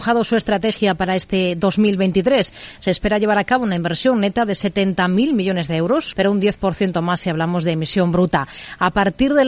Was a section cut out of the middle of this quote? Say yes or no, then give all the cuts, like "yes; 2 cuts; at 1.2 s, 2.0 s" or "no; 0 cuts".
yes; 1 cut; at 6.1 s